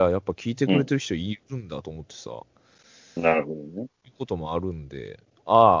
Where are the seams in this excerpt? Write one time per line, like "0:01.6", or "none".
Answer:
none